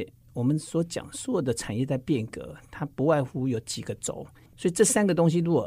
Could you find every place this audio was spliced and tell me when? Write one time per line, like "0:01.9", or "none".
0:04.5